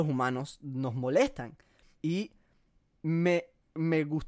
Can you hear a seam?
yes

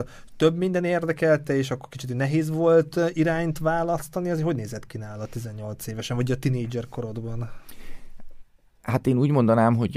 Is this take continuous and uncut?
yes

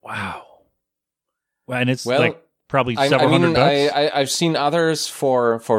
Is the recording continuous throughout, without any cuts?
yes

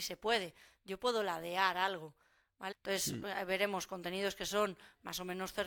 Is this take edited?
yes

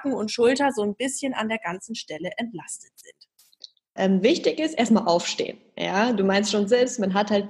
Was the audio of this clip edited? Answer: yes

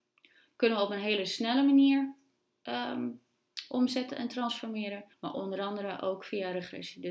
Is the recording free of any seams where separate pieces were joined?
no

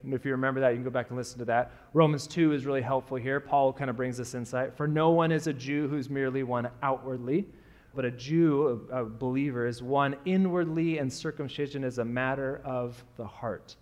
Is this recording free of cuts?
no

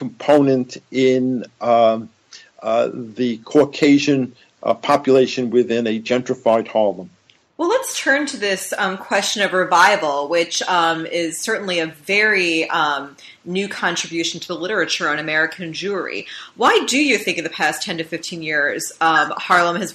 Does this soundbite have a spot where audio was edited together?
no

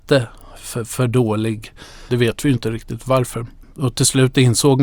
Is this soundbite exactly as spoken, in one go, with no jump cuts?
no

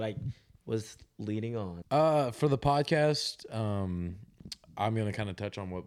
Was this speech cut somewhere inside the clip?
yes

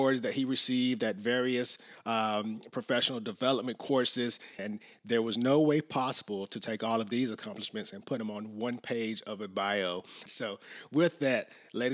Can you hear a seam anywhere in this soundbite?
yes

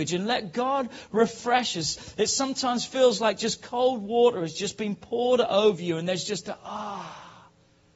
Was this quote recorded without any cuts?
yes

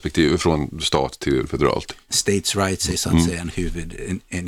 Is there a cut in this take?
yes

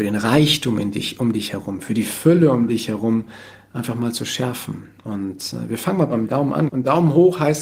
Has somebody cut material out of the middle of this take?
yes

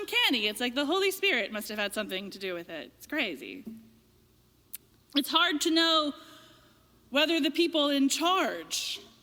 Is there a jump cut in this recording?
yes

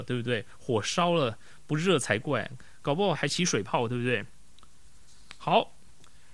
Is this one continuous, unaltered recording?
no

